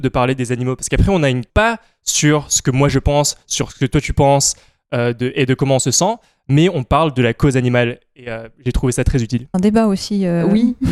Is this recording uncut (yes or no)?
no